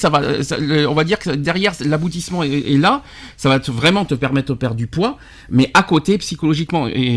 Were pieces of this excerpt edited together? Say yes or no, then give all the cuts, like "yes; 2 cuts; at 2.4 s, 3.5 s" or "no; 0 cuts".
no; 0 cuts